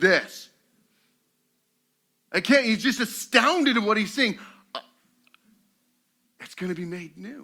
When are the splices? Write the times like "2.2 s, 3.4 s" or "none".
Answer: none